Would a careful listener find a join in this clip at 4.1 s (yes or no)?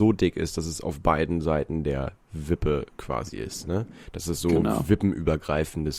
no